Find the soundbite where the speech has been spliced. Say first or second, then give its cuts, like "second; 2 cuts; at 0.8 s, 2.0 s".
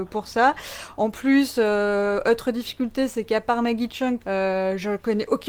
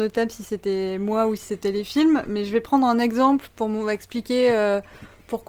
first; 1 cut; at 4.2 s